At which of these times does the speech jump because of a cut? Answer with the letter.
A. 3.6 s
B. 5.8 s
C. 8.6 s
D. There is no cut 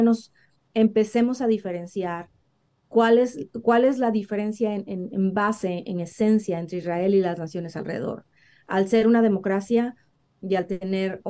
D